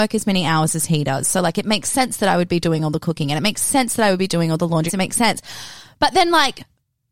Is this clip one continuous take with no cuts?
no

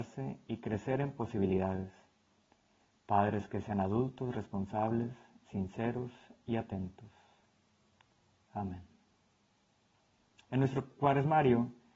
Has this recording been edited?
no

